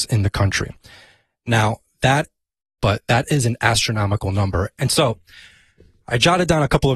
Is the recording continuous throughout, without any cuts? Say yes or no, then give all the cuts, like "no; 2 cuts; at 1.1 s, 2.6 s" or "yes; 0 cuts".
no; 2 cuts; at 2.8 s, 4.8 s